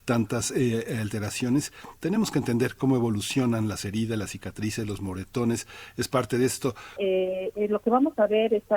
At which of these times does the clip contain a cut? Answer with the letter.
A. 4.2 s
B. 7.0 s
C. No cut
B